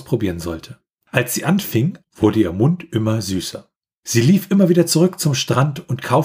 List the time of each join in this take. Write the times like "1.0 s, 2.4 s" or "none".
2.0 s